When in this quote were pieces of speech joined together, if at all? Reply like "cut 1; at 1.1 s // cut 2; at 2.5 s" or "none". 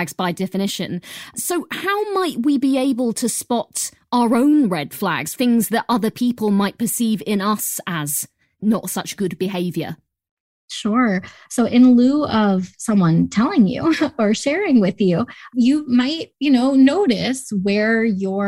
none